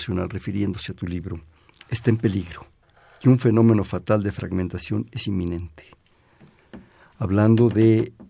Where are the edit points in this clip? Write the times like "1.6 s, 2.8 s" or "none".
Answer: none